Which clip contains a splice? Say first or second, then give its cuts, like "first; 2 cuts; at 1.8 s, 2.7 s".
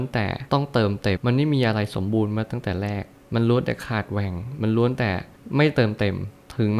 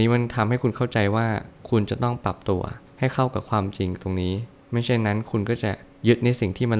first; 1 cut; at 1.2 s